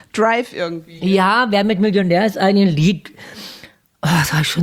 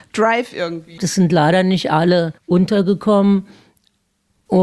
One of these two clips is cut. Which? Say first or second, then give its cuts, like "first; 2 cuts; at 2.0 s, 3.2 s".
second; 2 cuts; at 1.0 s, 2.4 s